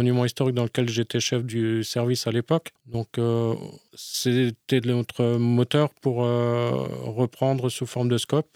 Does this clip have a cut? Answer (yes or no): yes